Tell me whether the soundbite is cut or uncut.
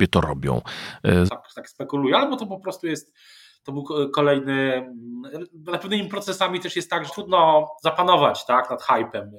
cut